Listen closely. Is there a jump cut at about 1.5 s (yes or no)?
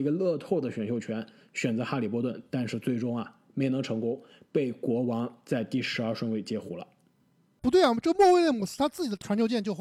no